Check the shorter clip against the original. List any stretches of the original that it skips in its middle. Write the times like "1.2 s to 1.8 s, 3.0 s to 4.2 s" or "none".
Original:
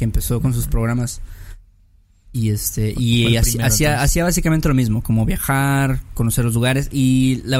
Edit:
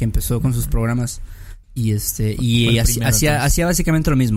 1.6 s to 2.2 s